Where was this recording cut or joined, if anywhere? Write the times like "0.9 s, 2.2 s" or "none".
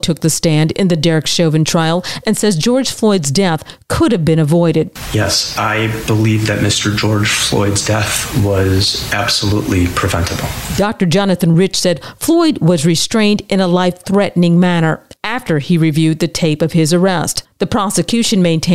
none